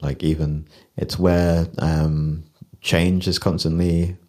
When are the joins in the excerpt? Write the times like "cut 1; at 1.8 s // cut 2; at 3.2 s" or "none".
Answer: none